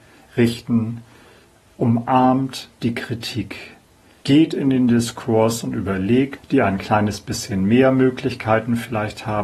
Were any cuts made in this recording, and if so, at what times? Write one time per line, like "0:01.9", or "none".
0:04.2
0:06.4